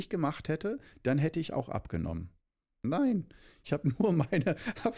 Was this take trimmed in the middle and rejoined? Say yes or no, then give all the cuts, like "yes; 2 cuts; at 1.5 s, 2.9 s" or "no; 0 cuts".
yes; 1 cut; at 2.8 s